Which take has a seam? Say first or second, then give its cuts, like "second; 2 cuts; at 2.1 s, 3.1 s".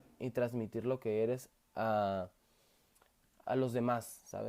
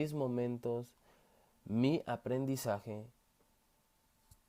first; 1 cut; at 3.4 s